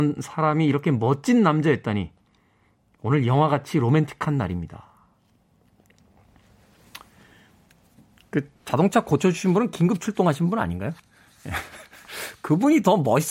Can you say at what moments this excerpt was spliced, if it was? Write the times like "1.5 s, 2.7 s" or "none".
none

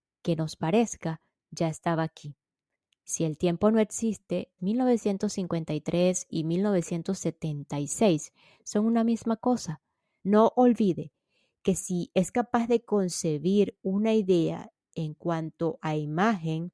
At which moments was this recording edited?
4.6 s, 10.2 s

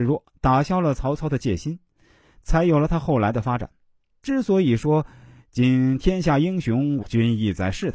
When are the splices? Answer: 4.2 s, 7.0 s

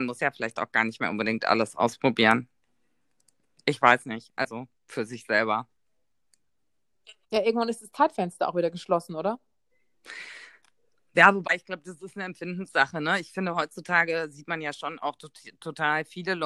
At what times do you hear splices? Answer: none

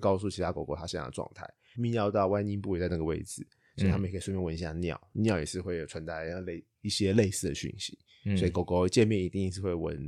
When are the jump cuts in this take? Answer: 1.7 s

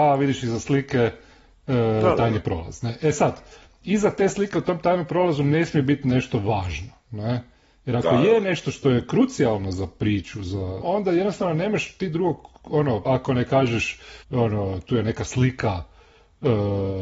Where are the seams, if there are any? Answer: 10.8 s, 13.0 s, 14.2 s

